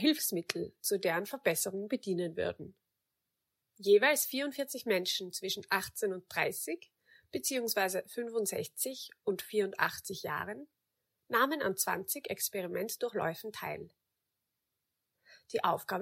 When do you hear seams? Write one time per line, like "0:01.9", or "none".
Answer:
0:03.7